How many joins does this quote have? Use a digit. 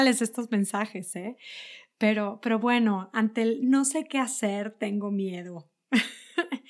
0